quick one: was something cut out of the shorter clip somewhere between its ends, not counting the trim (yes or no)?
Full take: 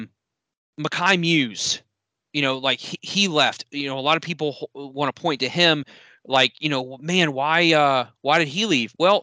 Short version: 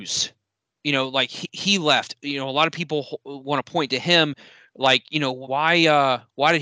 yes